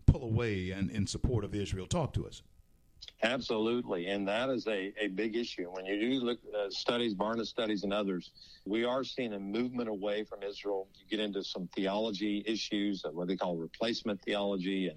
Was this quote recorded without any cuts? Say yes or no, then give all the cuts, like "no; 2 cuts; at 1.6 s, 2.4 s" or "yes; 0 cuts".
no; 1 cut; at 8.7 s